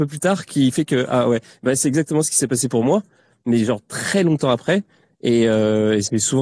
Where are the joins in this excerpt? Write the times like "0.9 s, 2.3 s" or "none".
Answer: none